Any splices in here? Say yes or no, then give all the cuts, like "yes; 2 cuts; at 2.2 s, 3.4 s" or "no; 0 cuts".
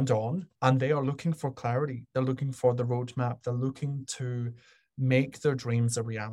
no; 0 cuts